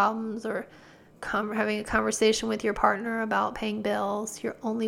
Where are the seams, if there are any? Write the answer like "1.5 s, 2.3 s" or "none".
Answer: 1.2 s